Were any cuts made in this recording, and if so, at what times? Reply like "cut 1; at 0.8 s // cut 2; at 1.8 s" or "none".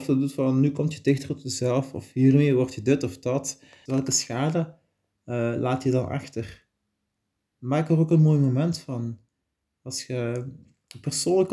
cut 1; at 3.9 s

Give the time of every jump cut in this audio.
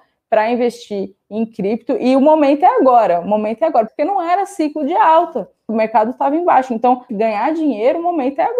cut 1; at 3.9 s // cut 2; at 5.7 s // cut 3; at 7.1 s

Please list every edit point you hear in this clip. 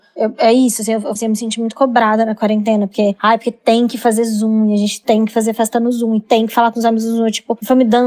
cut 1; at 1.2 s

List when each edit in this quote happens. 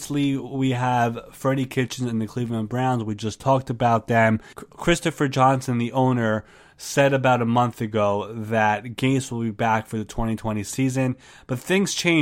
cut 1; at 4.5 s

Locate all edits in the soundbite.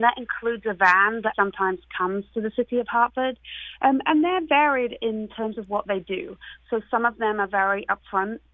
cut 1; at 1.3 s

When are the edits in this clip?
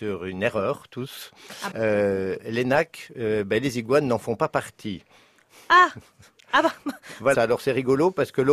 cut 1; at 1.7 s // cut 2; at 7.3 s

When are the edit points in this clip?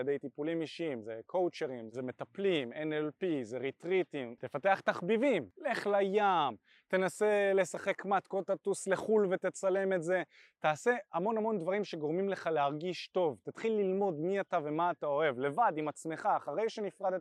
cut 1; at 4.4 s

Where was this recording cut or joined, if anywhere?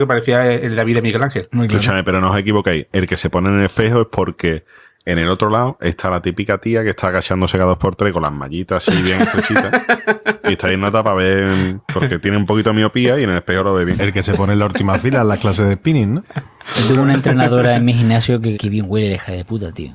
cut 1; at 16.2 s // cut 2; at 18.5 s

